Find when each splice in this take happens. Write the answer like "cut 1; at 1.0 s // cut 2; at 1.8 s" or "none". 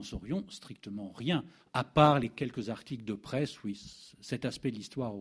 cut 1; at 1.6 s